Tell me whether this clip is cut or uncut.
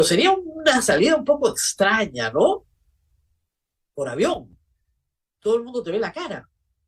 uncut